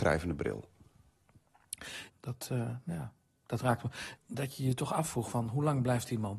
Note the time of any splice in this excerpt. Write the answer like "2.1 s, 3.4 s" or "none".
2.1 s, 4.2 s